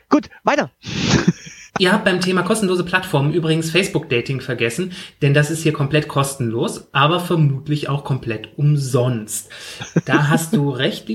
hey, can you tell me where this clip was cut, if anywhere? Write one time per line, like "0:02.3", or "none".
0:01.7